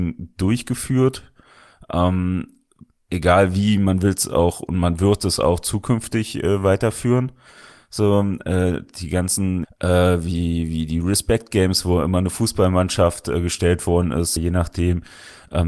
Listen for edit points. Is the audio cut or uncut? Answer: cut